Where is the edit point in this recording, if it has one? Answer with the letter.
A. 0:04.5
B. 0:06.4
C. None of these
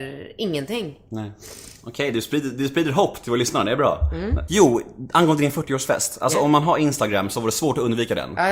A